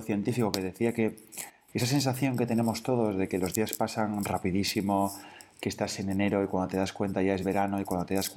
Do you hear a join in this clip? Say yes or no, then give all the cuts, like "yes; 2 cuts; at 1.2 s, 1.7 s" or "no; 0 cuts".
no; 0 cuts